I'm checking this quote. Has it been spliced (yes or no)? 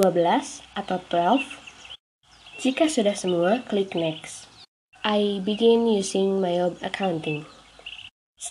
yes